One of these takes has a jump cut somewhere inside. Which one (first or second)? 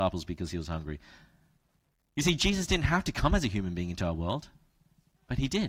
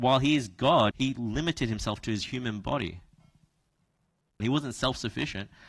second